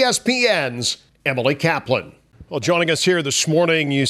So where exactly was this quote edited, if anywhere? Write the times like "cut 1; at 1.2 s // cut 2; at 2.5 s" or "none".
none